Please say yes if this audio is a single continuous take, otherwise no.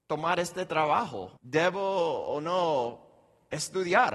no